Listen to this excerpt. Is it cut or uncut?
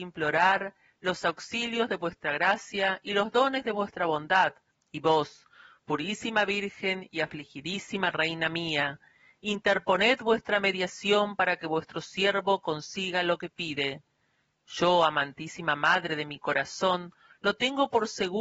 cut